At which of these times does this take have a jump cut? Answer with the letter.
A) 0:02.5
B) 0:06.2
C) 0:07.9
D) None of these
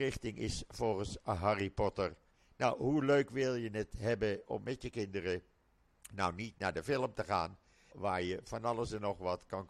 C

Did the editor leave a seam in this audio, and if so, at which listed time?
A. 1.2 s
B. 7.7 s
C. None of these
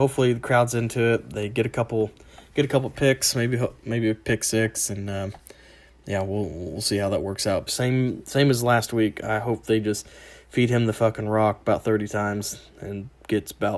B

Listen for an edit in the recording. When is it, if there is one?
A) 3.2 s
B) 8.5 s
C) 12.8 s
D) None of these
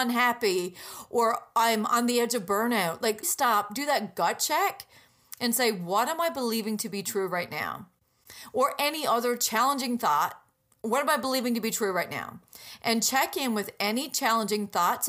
A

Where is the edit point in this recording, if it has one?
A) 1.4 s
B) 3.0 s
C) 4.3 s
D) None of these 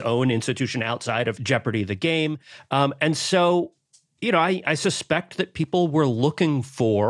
A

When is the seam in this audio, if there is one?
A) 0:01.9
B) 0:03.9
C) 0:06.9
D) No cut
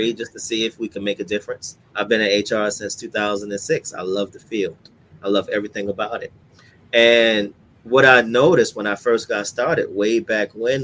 A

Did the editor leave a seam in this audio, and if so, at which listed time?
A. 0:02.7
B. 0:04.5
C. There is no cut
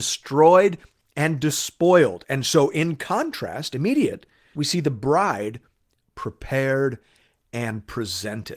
B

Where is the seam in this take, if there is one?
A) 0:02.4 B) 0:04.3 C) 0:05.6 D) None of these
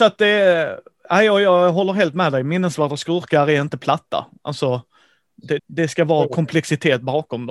C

